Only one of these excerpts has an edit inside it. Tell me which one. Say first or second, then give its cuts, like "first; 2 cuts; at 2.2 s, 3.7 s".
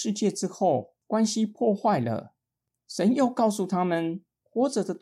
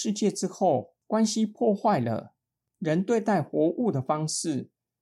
first; 1 cut; at 2.8 s